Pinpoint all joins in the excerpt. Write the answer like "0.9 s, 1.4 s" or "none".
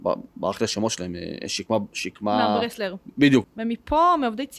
3.4 s